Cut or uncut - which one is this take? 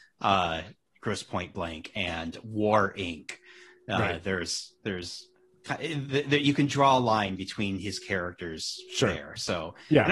uncut